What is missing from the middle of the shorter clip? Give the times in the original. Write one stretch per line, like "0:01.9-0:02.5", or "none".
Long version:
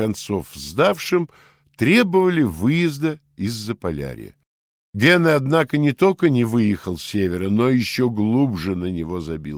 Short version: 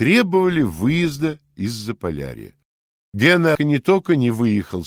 0:05.4-0:05.7